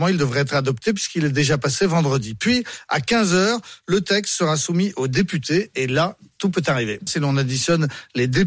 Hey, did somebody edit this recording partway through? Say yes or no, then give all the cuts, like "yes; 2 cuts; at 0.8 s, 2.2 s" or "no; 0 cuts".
yes; 1 cut; at 7.1 s